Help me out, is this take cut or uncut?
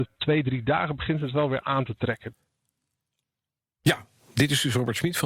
uncut